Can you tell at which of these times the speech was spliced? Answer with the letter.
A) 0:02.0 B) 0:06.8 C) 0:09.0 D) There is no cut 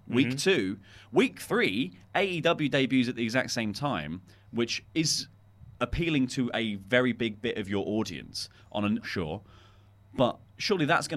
C